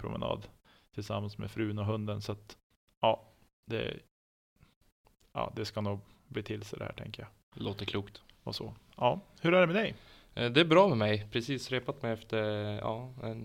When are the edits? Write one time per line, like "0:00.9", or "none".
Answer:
none